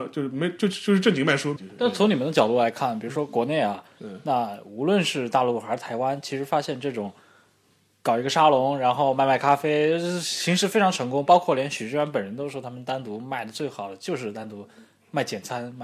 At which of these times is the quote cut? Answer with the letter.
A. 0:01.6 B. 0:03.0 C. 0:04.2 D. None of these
A